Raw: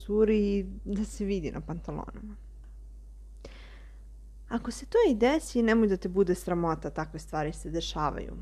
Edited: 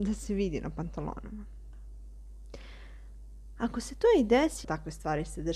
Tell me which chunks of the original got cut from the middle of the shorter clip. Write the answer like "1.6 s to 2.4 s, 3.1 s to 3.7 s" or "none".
5.6 s to 6.9 s

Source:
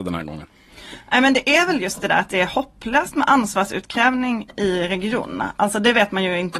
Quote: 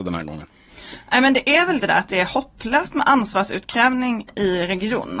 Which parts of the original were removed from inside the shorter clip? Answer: 1.8 s to 2.0 s

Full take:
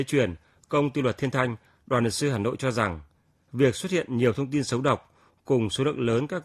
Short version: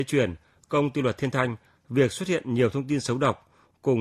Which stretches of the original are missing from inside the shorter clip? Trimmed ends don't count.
1.8 s to 3.4 s

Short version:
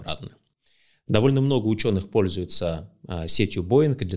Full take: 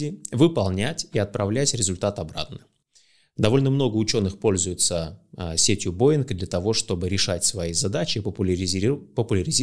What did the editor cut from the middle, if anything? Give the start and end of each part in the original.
none

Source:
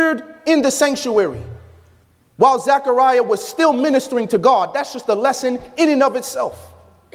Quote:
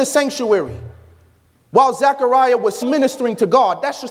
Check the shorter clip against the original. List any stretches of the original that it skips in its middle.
3.5 s to 3.7 s

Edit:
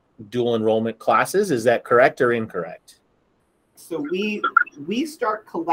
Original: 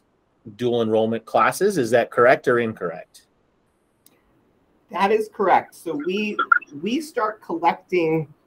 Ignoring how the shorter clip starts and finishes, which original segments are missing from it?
4.0 s to 5.7 s

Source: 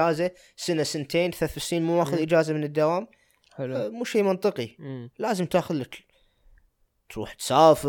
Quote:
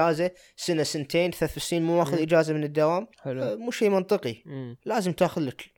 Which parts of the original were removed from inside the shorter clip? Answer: 3.1 s to 3.5 s

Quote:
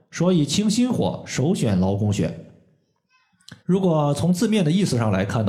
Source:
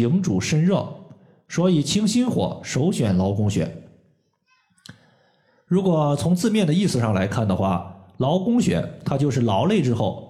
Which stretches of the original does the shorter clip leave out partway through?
5.0 s to 5.6 s

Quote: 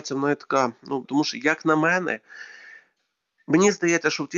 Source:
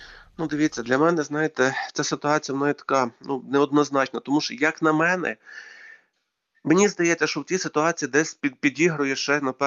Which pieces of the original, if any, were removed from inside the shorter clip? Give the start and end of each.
3.4 s to 4.2 s

